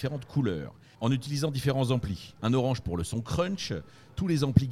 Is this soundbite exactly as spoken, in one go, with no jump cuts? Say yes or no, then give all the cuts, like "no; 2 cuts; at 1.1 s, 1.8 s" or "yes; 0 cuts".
no; 2 cuts; at 1.0 s, 2.4 s